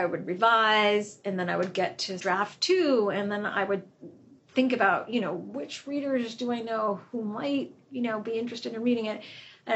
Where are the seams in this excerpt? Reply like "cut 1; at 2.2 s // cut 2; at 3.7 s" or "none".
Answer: cut 1; at 2.2 s